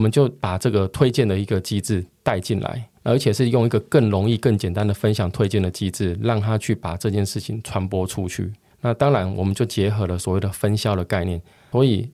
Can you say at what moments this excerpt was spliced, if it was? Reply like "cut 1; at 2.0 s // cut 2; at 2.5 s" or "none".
none